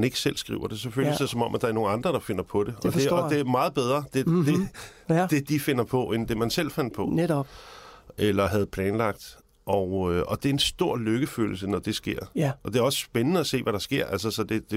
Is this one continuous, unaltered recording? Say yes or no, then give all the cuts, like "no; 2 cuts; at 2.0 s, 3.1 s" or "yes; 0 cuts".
yes; 0 cuts